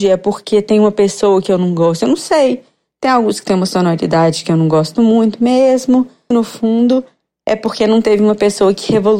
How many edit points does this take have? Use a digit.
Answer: 1